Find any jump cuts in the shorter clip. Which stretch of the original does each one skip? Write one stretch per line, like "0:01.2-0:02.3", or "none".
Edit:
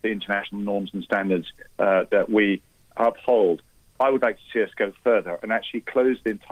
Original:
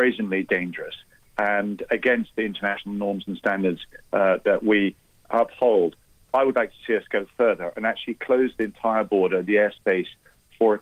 none